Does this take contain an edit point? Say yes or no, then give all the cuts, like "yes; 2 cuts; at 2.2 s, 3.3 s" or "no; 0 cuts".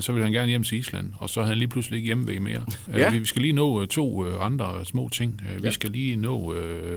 yes; 1 cut; at 2.9 s